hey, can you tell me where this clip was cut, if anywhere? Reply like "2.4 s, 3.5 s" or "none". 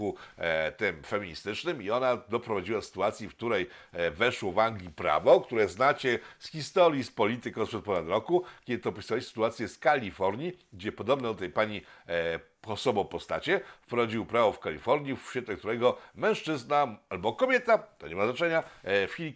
none